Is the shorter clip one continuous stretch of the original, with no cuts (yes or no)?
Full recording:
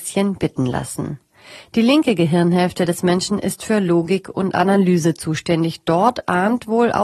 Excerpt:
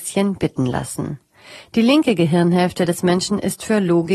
yes